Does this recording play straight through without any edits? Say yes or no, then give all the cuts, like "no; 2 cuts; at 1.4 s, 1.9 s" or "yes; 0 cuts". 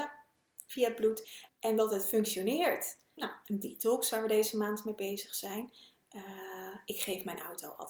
no; 2 cuts; at 1.5 s, 3.2 s